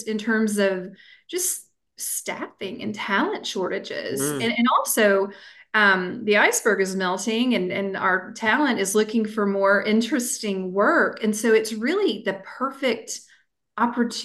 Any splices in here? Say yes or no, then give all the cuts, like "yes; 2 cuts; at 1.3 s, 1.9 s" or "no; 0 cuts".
no; 0 cuts